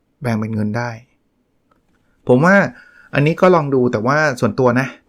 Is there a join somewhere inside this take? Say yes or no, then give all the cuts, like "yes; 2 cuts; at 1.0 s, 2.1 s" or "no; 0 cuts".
no; 0 cuts